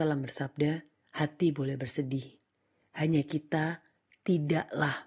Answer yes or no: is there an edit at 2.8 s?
no